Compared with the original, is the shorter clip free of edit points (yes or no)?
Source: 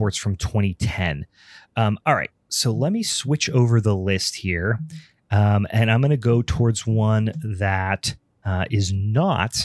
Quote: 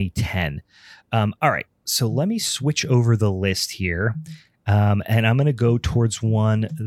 yes